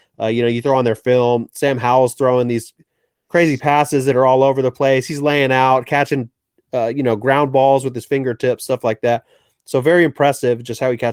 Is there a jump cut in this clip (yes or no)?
no